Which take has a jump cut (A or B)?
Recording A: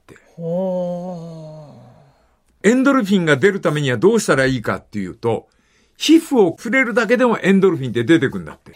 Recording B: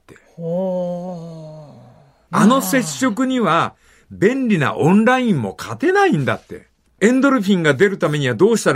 B